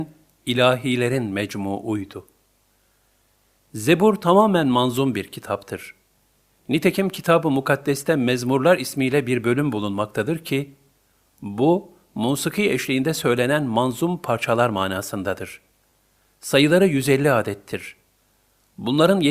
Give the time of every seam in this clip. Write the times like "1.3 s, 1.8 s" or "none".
none